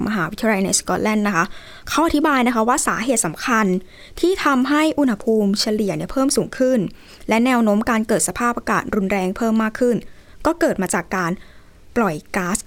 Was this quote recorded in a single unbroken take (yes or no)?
yes